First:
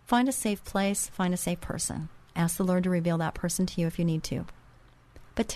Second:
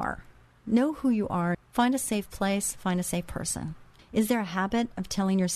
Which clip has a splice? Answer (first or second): second